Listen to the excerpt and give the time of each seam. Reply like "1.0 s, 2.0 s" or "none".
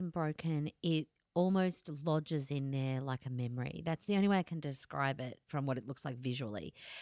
5.4 s